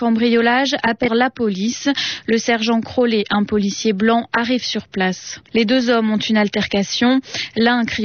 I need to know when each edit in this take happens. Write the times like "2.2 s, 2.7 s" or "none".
1.1 s